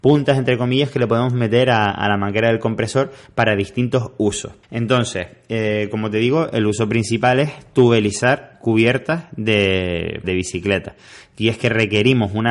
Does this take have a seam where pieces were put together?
yes; 2 cuts; at 4.6 s, 10.2 s

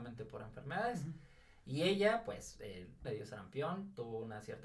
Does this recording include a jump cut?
yes; 1 cut; at 3.0 s

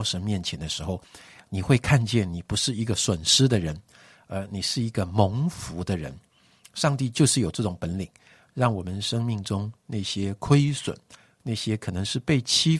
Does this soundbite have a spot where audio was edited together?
no; 0 cuts

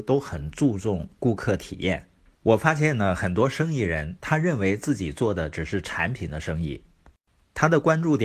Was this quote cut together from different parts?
yes; 1 cut; at 2.3 s

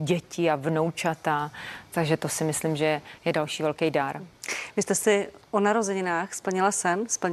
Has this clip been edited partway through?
yes; 1 cut; at 5.4 s

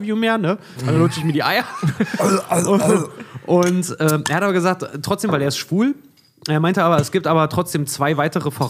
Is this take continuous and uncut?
yes; 0 cuts

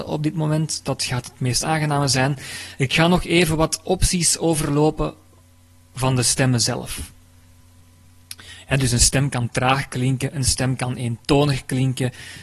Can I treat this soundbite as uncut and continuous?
yes; 0 cuts

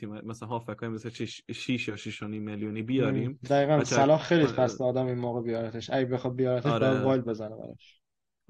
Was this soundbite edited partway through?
no; 0 cuts

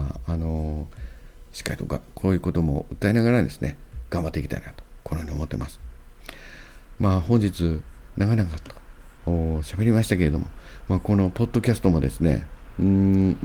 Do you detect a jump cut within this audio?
yes; 1 cut; at 1.4 s

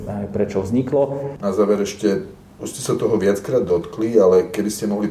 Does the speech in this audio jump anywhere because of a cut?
yes; 1 cut; at 1.4 s

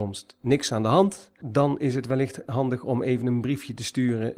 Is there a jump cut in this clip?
yes; 1 cut; at 1.4 s

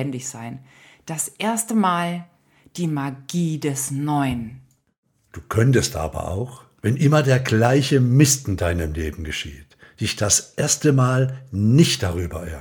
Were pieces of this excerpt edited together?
no; 0 cuts

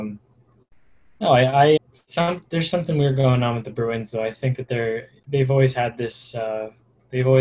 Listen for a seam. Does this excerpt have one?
yes; 1 cut; at 1.8 s

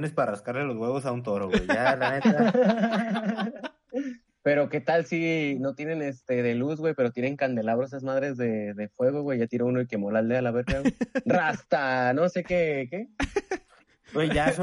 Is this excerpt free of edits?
no; 1 cut; at 4.3 s

